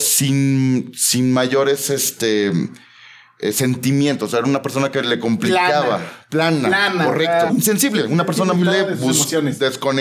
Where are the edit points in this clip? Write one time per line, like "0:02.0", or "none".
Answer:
0:07.5
0:08.6

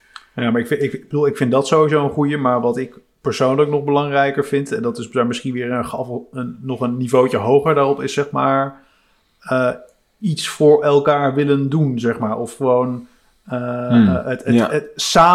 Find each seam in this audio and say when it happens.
none

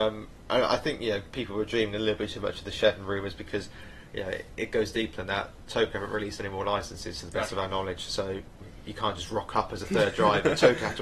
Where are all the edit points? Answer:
none

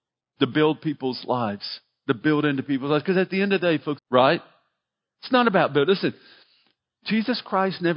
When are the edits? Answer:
0:04.0

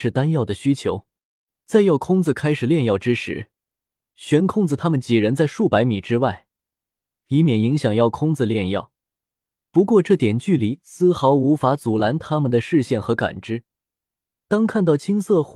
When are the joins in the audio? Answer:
none

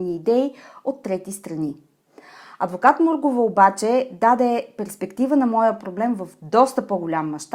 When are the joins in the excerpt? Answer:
none

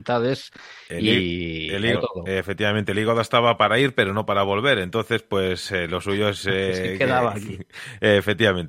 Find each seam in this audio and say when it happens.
0:01.9

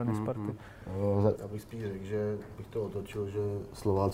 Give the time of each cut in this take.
0:01.4

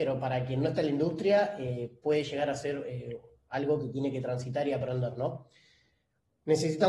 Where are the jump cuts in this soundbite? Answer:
none

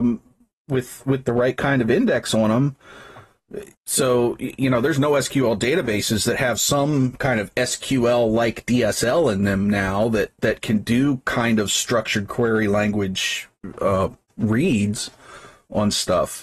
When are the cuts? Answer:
0:03.7

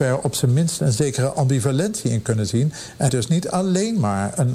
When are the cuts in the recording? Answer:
0:03.1

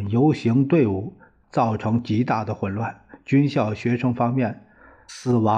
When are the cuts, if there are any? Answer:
0:01.4

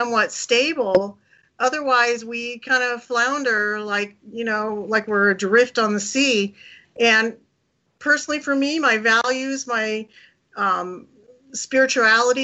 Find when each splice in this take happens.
none

